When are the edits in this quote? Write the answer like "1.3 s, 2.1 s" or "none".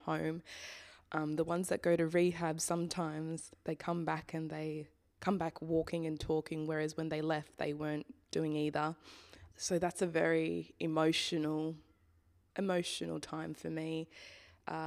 none